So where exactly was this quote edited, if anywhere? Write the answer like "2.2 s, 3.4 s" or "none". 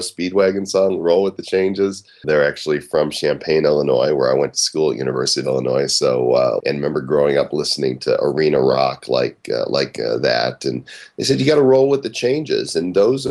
2.2 s, 6.6 s